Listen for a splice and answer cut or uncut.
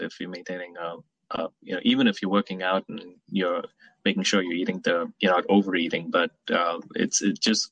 cut